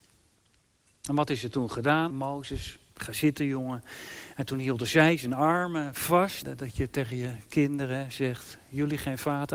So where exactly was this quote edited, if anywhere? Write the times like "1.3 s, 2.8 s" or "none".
2.1 s, 6.4 s